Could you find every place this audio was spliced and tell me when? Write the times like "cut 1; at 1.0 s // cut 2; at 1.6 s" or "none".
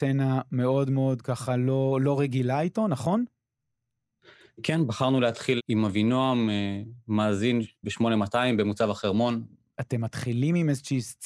cut 1; at 5.6 s // cut 2; at 9.7 s